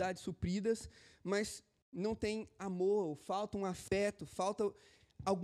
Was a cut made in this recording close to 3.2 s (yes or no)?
no